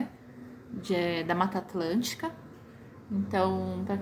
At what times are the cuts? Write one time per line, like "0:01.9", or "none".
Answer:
none